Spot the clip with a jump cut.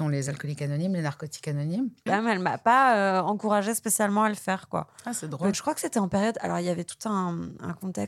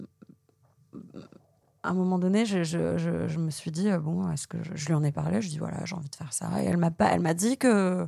first; 2 cuts; at 2.1 s, 5.5 s

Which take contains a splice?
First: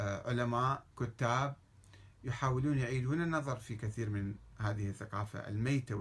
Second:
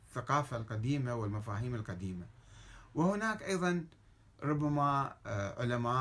first; 1 cut; at 0.9 s

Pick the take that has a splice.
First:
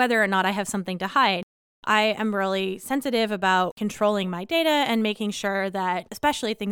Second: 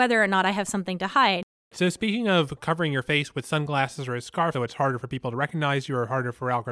second; 2 cuts; at 1.7 s, 4.5 s

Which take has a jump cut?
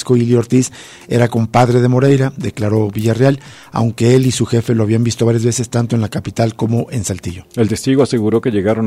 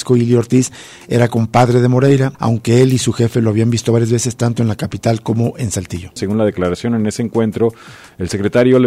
second; 2 cuts; at 2.3 s, 6.2 s

